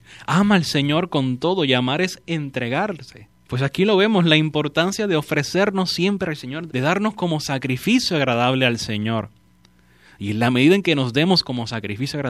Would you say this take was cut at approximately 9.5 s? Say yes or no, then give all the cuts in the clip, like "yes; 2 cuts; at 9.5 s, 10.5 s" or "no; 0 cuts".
no; 2 cuts; at 3.3 s, 6.7 s